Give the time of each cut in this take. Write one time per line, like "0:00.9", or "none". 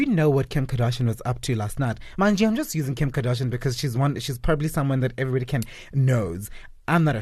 none